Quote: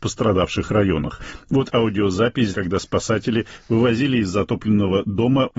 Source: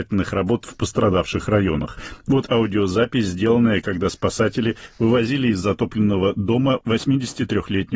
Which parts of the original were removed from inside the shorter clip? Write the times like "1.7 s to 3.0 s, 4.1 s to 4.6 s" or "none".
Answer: 3.3 s to 3.8 s